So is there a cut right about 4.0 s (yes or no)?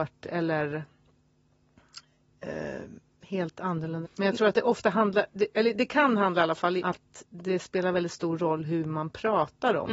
yes